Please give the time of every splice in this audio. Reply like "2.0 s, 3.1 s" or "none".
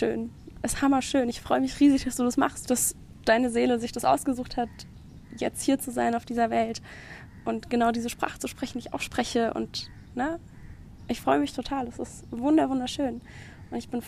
2.7 s